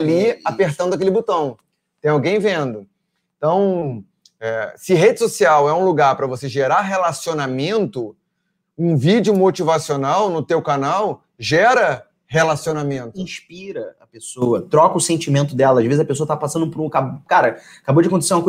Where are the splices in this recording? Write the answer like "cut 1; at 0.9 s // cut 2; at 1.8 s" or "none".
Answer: none